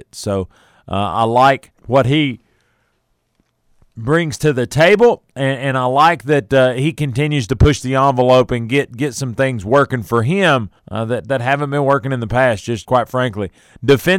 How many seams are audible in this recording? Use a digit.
3